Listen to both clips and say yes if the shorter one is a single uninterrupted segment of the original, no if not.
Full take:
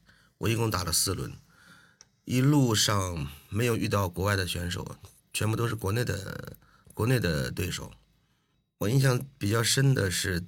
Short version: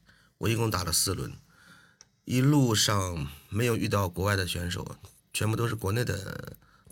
yes